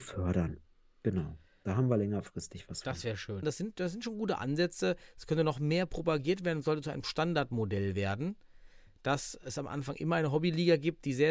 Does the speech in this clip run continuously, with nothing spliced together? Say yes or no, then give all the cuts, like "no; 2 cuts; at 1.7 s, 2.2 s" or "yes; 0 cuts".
no; 1 cut; at 3.4 s